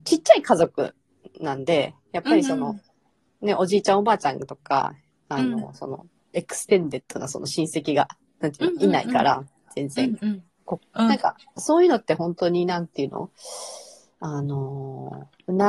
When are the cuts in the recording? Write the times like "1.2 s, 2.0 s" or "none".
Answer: 10.8 s